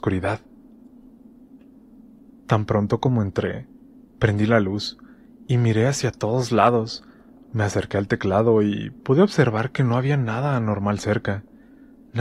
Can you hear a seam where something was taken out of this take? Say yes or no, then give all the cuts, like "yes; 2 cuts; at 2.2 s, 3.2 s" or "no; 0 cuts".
no; 0 cuts